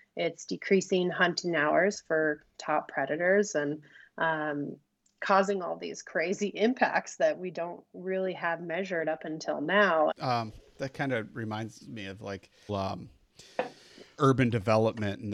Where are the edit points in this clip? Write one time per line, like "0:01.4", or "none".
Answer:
0:10.1
0:12.7
0:14.2